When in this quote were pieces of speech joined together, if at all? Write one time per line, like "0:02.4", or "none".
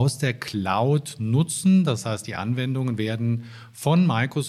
none